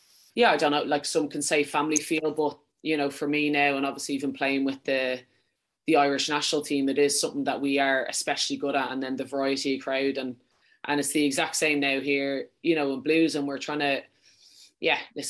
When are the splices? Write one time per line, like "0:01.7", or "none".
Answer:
none